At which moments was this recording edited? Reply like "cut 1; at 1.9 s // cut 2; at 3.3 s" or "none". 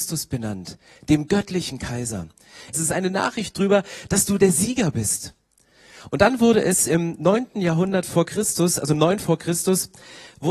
cut 1; at 2.7 s